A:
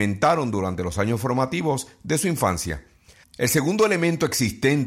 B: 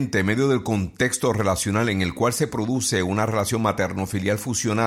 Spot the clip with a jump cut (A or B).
A